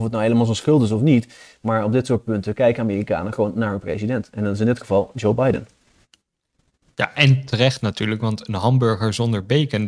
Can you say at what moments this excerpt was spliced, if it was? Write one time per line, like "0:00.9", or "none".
none